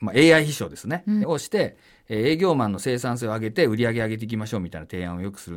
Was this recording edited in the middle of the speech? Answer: yes; 1 cut; at 1.2 s

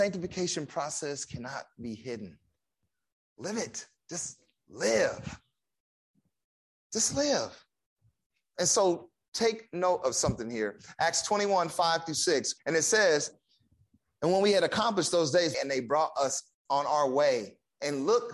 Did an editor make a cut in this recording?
yes; 2 cuts; at 12.6 s, 15.5 s

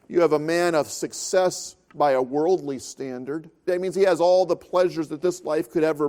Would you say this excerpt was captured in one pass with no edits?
no; 1 cut; at 3.7 s

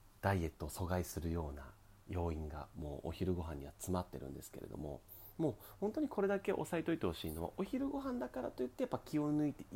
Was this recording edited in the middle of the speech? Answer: no; 0 cuts

